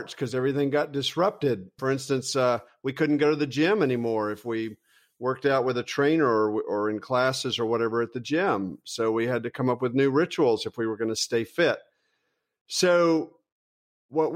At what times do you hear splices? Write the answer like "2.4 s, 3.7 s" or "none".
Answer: none